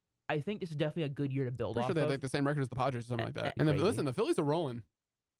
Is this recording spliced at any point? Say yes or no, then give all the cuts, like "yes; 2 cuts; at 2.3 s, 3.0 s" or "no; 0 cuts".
yes; 1 cut; at 3.6 s